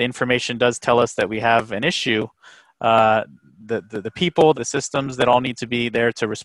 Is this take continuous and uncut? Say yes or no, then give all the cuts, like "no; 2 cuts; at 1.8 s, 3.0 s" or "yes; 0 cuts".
no; 2 cuts; at 3.5 s, 4.5 s